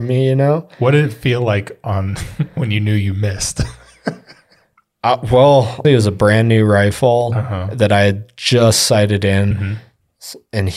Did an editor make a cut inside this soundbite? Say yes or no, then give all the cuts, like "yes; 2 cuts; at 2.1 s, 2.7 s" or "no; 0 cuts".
yes; 2 cuts; at 5.8 s, 9.5 s